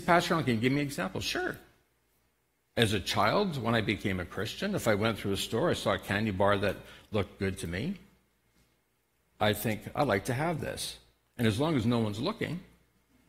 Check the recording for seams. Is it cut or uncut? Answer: uncut